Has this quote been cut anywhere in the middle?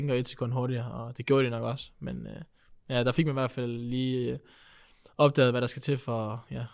no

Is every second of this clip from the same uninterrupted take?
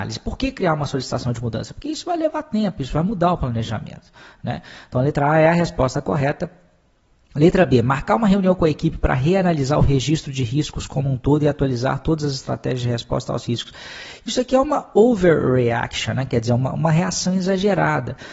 yes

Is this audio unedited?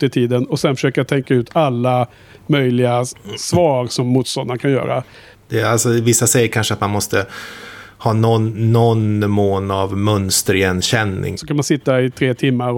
no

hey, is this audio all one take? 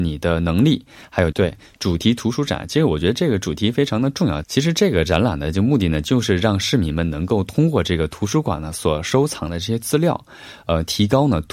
no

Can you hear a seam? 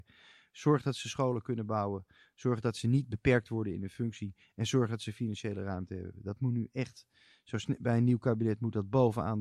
no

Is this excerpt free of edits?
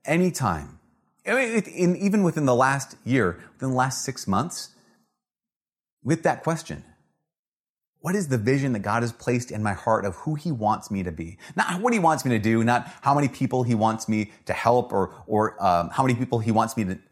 yes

